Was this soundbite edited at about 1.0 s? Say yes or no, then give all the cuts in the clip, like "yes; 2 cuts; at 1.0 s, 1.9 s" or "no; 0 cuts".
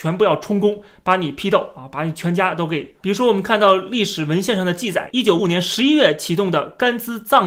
no; 2 cuts; at 3.0 s, 5.4 s